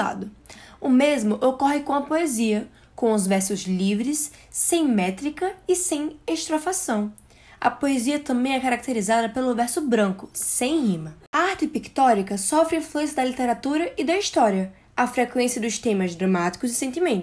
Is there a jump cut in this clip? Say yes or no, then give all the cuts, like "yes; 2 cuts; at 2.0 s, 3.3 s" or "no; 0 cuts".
no; 0 cuts